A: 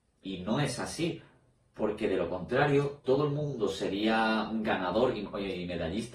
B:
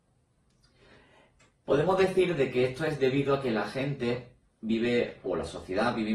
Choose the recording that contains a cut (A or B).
A